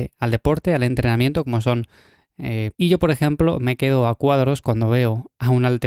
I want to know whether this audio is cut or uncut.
cut